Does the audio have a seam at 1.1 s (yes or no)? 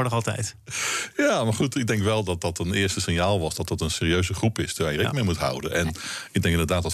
no